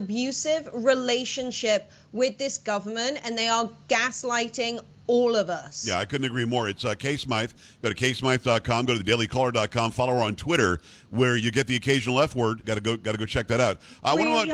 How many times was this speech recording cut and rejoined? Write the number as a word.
one